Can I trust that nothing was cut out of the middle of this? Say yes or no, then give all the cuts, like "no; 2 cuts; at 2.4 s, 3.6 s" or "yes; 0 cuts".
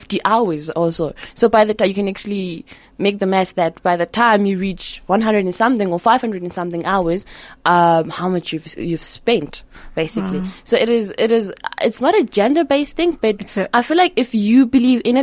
yes; 0 cuts